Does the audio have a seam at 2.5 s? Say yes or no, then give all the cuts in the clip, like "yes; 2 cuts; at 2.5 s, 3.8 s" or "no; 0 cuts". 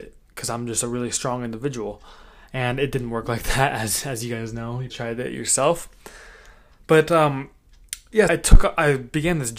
no; 2 cuts; at 4.9 s, 8.3 s